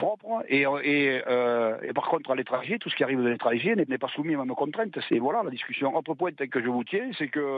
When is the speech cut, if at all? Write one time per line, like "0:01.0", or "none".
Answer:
0:03.9
0:05.1